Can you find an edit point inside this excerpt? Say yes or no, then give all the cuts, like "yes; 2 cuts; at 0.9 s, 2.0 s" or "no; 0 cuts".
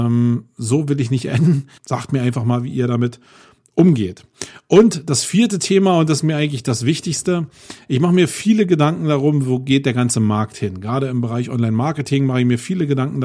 yes; 1 cut; at 1.8 s